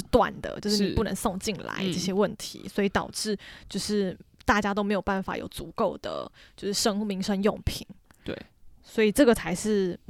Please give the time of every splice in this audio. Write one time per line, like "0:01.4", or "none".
none